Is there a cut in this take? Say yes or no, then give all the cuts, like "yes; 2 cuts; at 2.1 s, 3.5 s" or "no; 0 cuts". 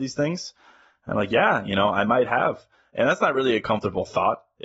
no; 0 cuts